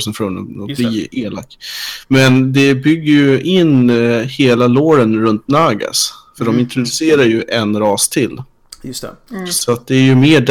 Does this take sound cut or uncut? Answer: uncut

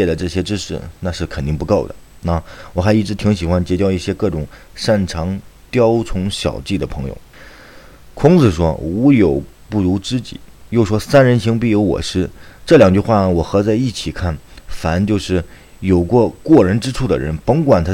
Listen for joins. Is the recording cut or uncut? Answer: uncut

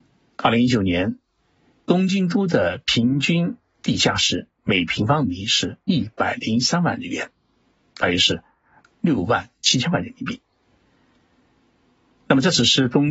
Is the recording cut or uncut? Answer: uncut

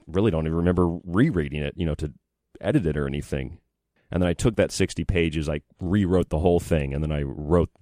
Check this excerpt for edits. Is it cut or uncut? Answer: cut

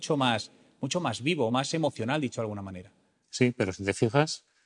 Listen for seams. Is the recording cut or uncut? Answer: uncut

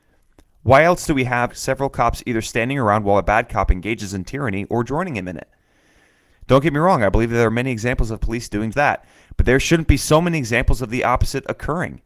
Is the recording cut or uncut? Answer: cut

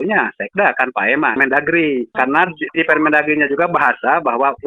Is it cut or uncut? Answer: cut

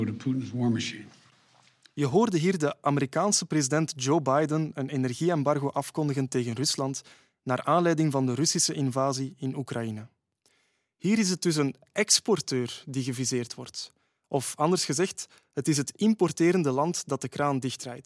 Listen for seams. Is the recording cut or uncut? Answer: uncut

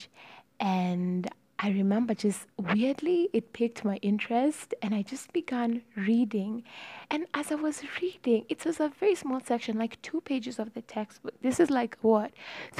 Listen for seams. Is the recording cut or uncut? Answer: uncut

